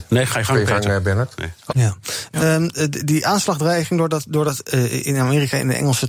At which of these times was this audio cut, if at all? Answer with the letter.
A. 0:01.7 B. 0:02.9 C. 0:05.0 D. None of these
A